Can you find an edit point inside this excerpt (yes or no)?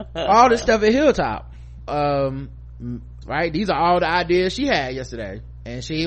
yes